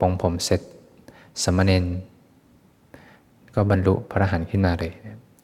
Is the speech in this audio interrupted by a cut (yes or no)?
no